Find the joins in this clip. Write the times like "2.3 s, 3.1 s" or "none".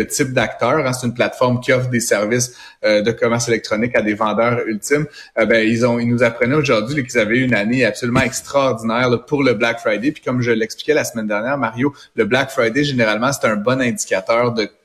none